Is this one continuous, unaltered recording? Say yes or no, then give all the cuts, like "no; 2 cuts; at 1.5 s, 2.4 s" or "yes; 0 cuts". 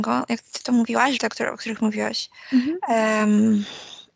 no; 1 cut; at 1.2 s